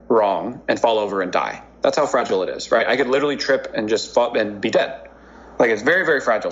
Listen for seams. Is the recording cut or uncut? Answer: uncut